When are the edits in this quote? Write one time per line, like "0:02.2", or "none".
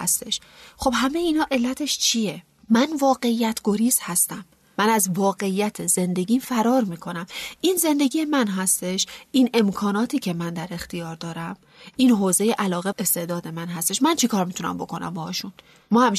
0:12.9